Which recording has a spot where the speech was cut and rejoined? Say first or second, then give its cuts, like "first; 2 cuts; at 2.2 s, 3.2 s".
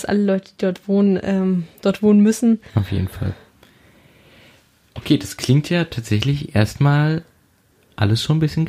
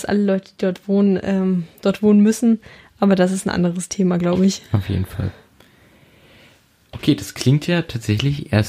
first; 1 cut; at 2.7 s